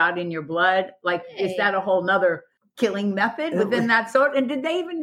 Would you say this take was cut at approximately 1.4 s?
no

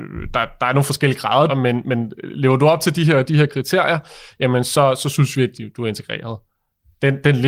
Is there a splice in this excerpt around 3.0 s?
no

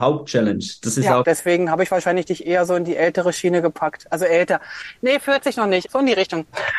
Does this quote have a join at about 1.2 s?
yes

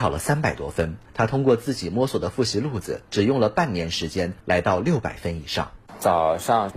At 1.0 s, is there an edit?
yes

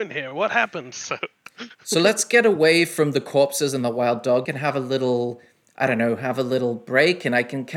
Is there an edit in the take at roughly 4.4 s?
yes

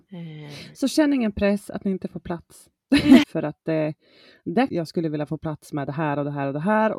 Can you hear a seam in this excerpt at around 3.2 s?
yes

